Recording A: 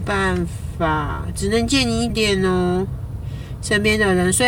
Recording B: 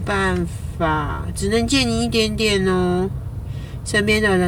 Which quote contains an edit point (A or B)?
A